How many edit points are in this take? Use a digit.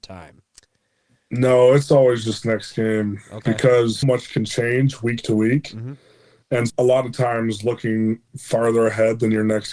3